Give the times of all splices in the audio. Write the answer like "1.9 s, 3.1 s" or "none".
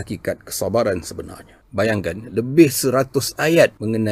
1.6 s